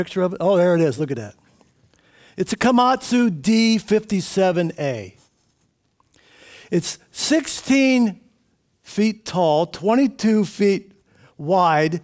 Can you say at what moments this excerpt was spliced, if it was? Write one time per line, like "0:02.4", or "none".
none

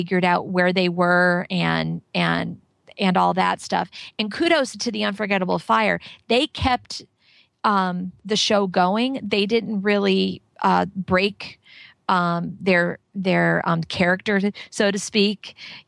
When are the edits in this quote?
none

